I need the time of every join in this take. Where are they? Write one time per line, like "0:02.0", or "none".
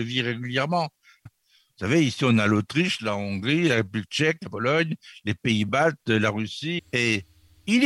0:01.3
0:06.8